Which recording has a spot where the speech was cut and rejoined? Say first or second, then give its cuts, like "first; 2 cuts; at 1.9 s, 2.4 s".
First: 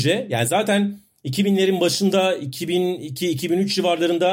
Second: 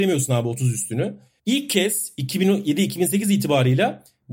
second; 1 cut; at 1.4 s